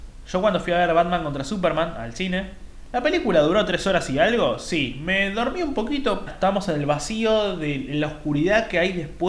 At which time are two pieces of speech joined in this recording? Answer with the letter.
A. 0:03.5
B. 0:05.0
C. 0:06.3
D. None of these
C